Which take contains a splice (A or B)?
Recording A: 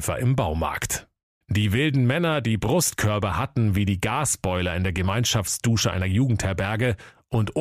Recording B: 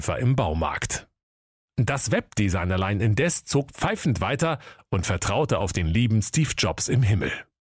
A